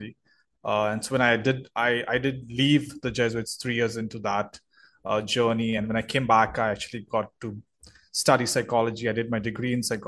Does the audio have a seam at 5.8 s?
no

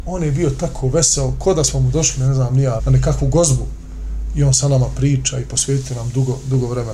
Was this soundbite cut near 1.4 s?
no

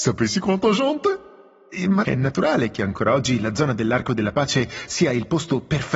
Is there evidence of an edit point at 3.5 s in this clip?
no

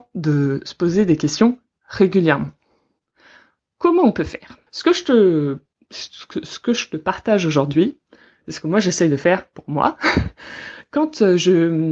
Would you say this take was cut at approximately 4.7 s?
yes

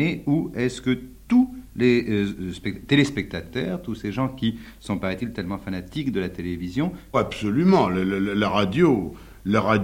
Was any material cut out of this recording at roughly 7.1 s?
yes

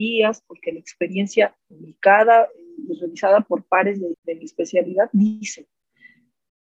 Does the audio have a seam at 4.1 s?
yes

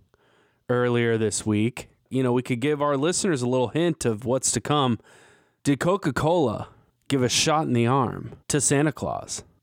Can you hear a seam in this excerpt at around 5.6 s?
no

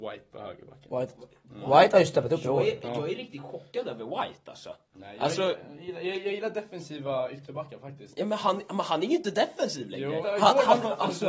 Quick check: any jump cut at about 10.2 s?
yes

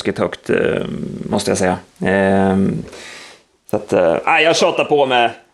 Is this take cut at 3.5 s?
no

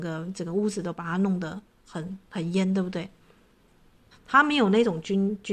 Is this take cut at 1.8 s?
no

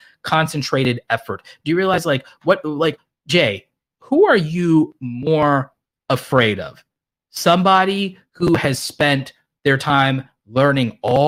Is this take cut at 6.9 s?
no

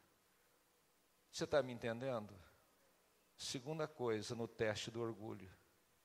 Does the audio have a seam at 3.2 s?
no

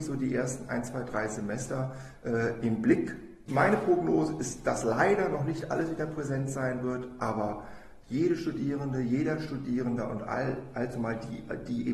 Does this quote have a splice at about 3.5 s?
no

